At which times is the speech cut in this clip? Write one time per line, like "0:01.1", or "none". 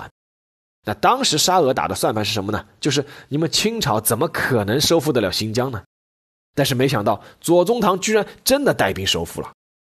none